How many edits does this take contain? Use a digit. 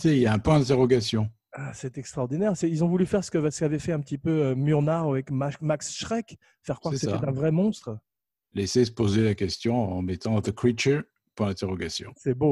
0